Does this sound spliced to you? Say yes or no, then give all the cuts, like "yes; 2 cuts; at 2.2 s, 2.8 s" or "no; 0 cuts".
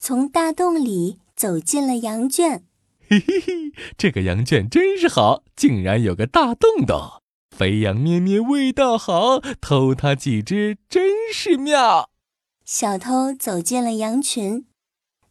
no; 0 cuts